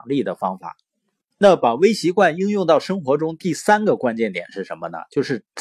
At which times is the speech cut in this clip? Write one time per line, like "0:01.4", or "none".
none